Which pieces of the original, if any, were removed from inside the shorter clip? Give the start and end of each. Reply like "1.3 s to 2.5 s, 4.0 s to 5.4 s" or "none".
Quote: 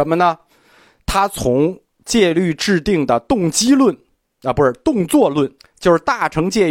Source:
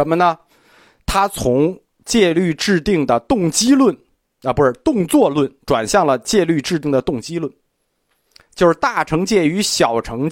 5.6 s to 8.3 s